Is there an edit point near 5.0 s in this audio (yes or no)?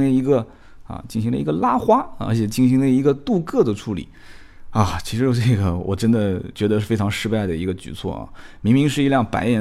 no